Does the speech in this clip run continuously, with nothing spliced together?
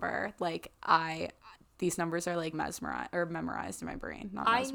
no; 1 cut; at 2.5 s

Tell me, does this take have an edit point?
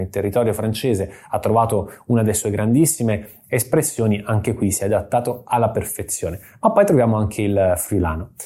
no; 0 cuts

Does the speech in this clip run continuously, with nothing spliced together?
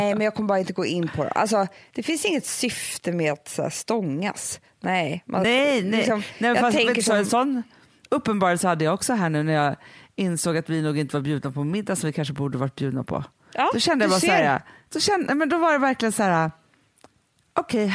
yes; 0 cuts

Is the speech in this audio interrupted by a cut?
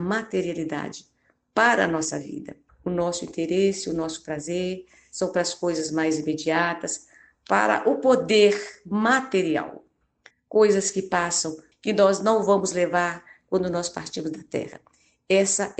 yes; 3 cuts; at 2.7 s, 10.3 s, 11.7 s

